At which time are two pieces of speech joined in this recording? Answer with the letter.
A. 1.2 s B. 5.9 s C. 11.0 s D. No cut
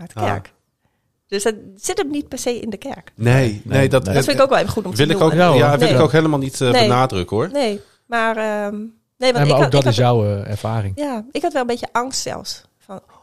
C